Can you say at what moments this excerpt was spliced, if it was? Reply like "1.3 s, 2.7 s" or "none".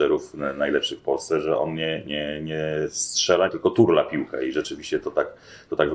3.5 s

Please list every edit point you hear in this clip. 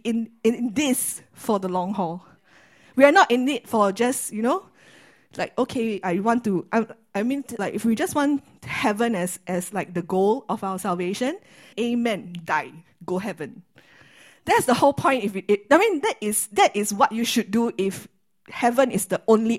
7.6 s, 11.7 s, 16.0 s

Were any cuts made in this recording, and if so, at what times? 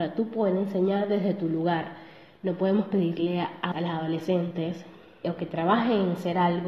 3.7 s, 5.2 s

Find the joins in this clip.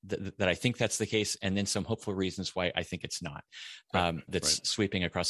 4.3 s

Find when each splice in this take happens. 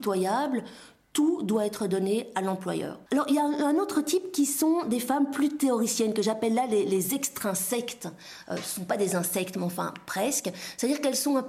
3.1 s

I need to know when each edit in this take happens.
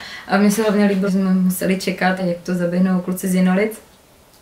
1.1 s, 2.2 s

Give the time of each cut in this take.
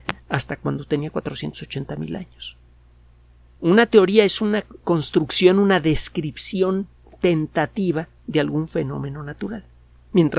3.5 s, 4.8 s

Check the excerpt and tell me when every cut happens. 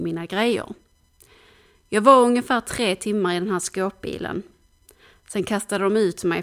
none

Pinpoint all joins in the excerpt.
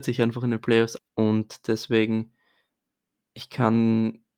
1.0 s

